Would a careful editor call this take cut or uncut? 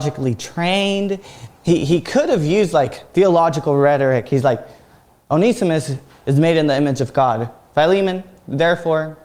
uncut